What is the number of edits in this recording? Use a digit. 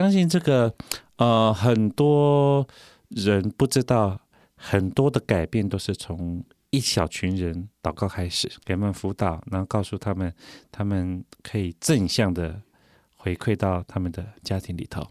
1